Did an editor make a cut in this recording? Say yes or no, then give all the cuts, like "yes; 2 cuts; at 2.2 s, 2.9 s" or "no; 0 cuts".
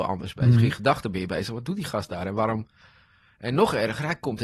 no; 0 cuts